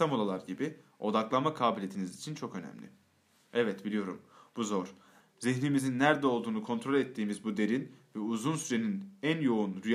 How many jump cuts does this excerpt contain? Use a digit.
1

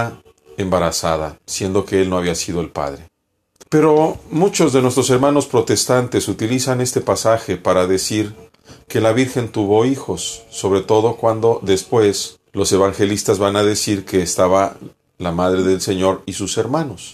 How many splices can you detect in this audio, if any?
2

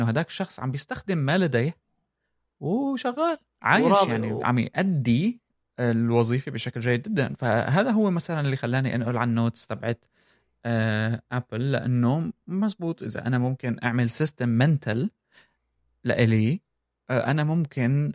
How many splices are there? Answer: 1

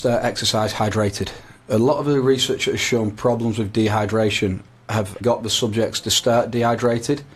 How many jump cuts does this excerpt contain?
1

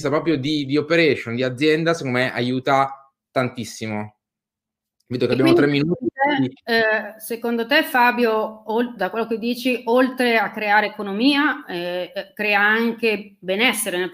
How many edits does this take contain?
0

